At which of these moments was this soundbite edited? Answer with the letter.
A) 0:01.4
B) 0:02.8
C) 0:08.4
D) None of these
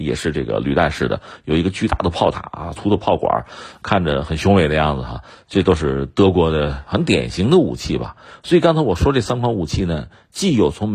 B